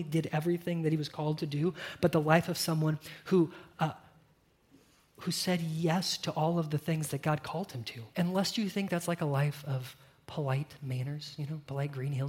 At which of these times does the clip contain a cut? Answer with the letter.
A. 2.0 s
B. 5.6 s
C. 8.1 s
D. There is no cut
C